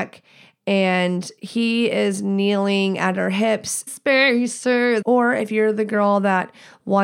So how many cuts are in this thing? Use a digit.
2